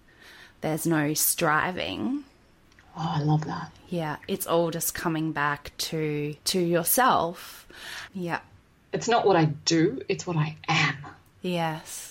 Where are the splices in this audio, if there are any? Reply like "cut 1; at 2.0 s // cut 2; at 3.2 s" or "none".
cut 1; at 6.4 s // cut 2; at 8.1 s

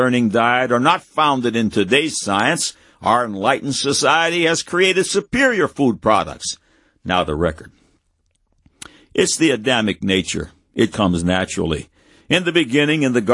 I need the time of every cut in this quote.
cut 1; at 10.9 s

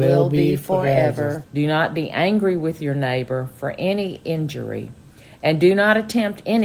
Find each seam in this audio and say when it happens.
cut 1; at 1.4 s

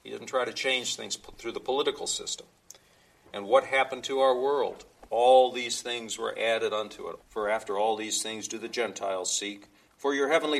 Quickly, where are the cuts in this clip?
cut 1; at 7.2 s

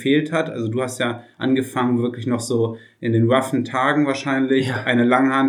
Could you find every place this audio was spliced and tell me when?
none

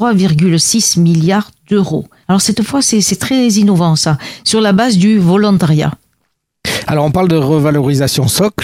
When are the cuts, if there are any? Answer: cut 1; at 2.2 s

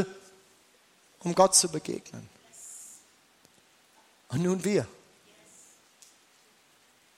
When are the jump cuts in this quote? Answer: none

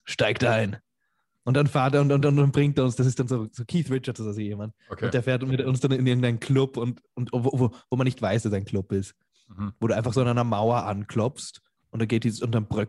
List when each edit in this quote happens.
none

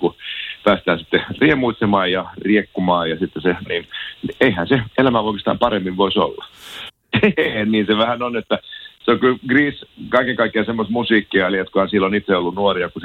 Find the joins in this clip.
cut 1; at 3.7 s // cut 2; at 6.9 s // cut 3; at 11.5 s

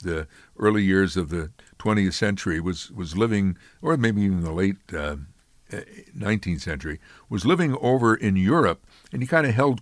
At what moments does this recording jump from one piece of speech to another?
none

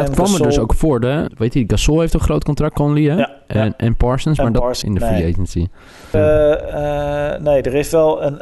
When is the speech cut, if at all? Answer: cut 1; at 1.3 s // cut 2; at 4.8 s // cut 3; at 6.1 s

